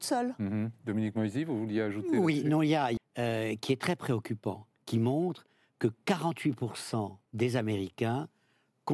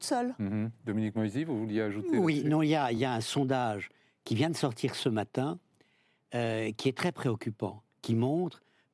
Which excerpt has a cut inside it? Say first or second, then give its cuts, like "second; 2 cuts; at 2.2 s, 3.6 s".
first; 2 cuts; at 3.0 s, 7.3 s